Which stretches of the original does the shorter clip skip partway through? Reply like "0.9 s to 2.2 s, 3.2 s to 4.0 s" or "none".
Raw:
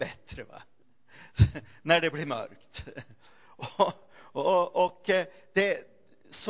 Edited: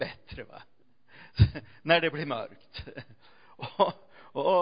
none